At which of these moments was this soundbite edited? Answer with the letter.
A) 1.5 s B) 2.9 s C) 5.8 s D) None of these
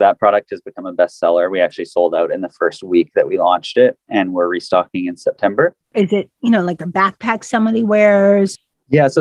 C